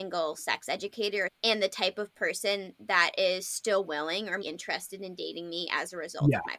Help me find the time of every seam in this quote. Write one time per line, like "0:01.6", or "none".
0:01.3
0:04.4